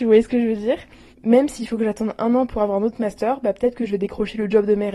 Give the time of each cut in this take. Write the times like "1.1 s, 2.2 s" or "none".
1.1 s

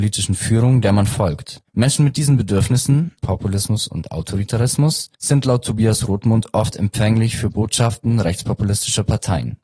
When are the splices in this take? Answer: 3.2 s, 5.1 s

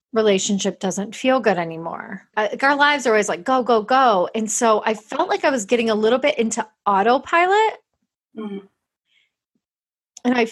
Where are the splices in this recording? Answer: 2.3 s

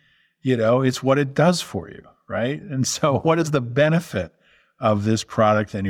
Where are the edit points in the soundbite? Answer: none

